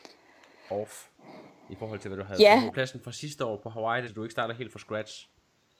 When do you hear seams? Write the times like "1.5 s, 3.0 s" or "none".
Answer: 2.7 s, 4.1 s

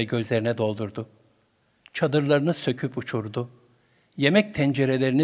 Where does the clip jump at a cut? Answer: none

